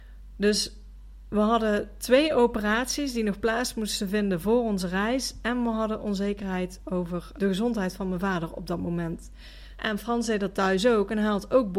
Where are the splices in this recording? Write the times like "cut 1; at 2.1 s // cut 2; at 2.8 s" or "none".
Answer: cut 1; at 7.3 s // cut 2; at 9.7 s

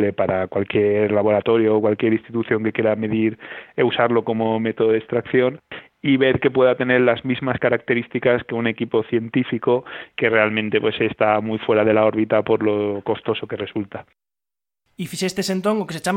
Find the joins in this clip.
none

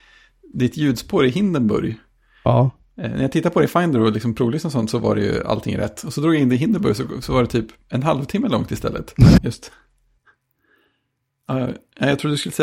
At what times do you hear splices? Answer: cut 1; at 9.4 s

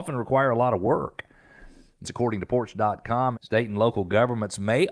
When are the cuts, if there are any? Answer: cut 1; at 2.0 s // cut 2; at 3.3 s

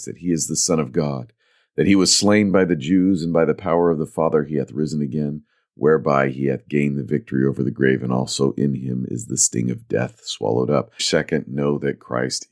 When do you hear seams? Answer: cut 1; at 11.0 s

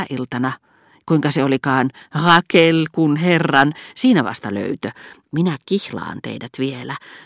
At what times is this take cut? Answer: none

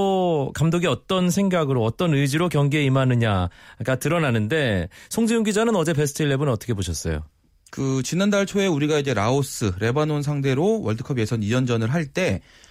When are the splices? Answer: none

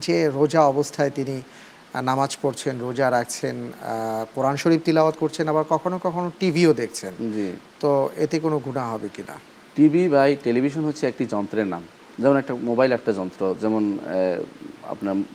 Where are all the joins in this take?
none

